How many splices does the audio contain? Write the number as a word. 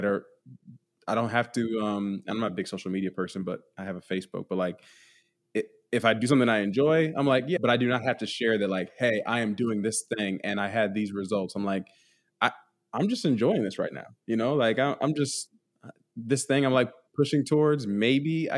one